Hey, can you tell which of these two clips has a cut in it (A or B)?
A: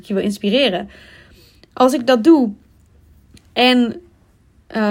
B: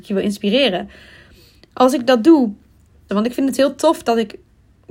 B